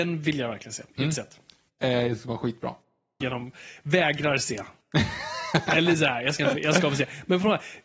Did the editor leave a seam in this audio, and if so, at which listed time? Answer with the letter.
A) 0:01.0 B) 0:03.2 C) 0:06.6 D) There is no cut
B